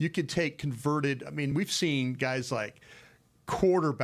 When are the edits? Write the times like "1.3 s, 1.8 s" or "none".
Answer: none